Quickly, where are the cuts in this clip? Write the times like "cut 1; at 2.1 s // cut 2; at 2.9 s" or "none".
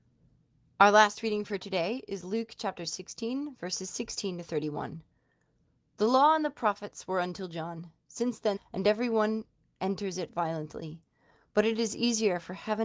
cut 1; at 8.6 s